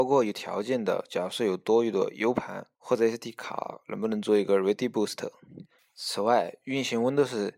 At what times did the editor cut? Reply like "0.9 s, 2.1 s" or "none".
2.7 s, 5.8 s